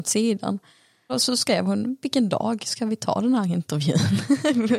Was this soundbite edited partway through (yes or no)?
no